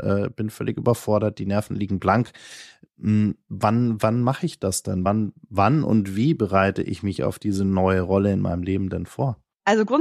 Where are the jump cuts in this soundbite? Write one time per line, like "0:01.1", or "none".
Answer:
none